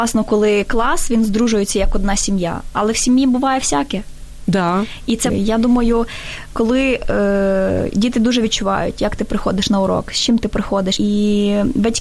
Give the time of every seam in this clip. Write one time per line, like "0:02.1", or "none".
0:05.3
0:11.0